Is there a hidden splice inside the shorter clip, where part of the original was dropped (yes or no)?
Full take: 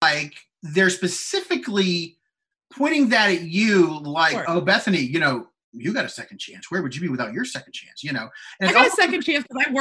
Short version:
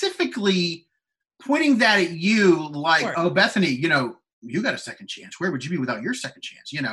no